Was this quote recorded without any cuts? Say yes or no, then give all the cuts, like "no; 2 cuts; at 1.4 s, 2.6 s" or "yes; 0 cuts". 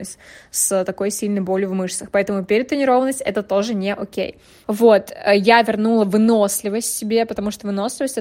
no; 1 cut; at 4.6 s